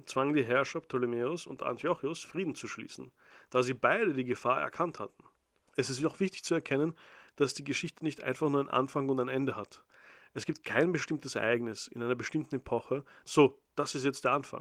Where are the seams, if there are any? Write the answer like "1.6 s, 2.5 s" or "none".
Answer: 5.7 s, 13.3 s